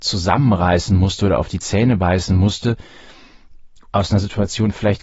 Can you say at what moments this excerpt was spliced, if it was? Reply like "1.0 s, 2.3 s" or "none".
3.8 s